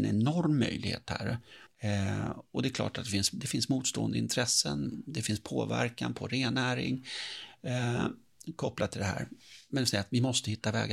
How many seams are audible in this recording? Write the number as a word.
one